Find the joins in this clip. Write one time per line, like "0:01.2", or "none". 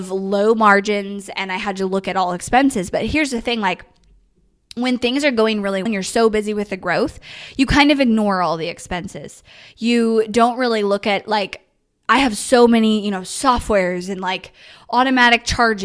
0:05.9